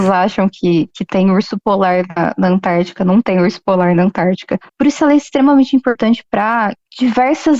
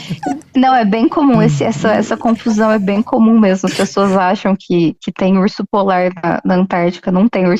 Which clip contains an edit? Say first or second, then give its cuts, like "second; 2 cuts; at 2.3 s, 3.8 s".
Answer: first; 1 cut; at 4.7 s